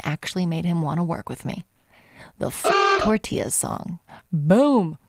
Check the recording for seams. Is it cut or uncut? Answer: uncut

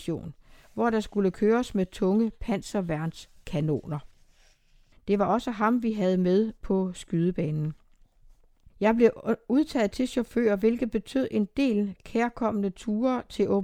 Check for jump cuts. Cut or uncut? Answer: cut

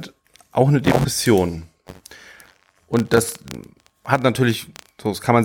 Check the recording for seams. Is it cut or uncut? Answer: uncut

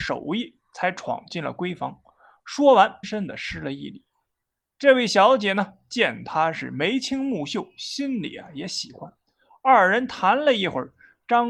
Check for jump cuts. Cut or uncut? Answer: cut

